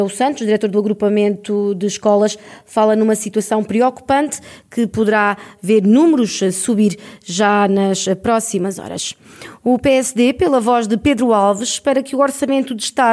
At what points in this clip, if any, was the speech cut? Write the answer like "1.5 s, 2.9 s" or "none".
none